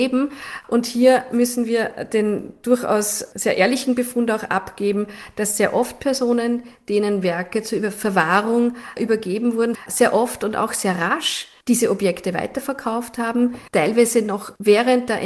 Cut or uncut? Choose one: cut